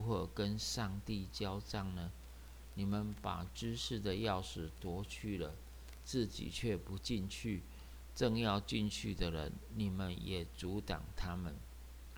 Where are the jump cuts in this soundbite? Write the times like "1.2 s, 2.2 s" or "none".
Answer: none

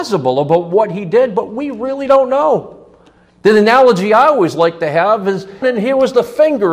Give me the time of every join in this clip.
5.6 s

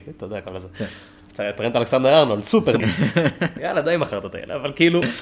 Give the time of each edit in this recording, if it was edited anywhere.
2.8 s

